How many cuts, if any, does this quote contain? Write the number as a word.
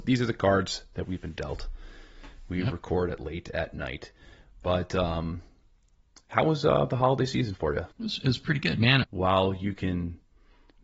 two